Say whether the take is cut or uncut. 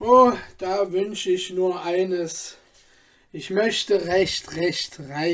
uncut